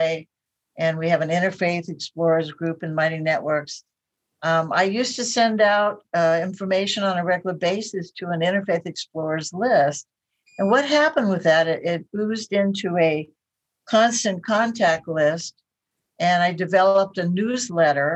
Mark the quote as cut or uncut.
uncut